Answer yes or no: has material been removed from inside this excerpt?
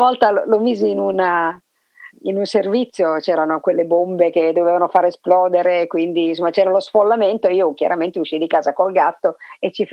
yes